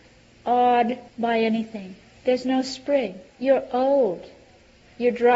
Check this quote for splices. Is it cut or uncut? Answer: cut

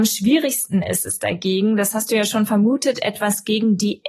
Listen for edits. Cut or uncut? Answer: uncut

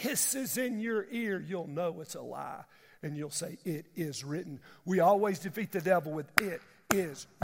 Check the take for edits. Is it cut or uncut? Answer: uncut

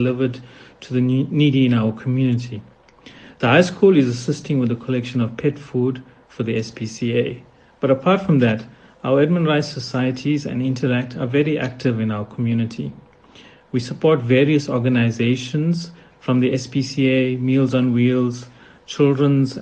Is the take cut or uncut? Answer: uncut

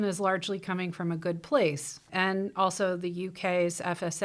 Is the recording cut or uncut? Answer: cut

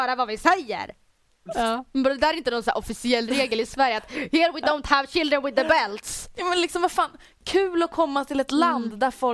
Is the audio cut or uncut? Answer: cut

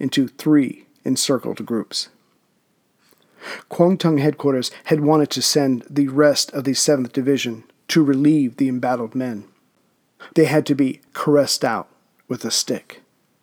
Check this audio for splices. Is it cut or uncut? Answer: cut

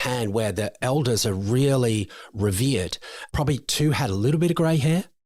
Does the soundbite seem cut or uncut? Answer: cut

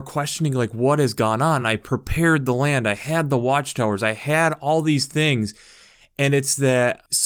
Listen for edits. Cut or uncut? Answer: uncut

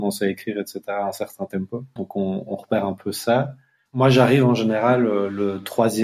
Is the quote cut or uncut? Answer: cut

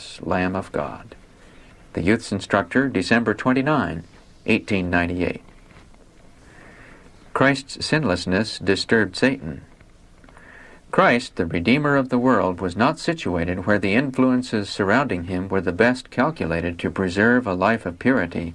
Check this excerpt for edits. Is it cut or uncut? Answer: uncut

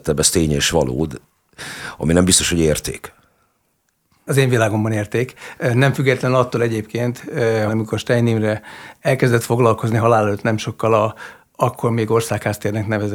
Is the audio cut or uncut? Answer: cut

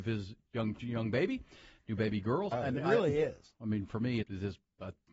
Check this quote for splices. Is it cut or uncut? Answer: cut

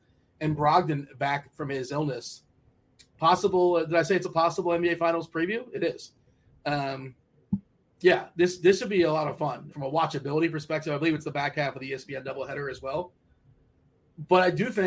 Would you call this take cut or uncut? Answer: cut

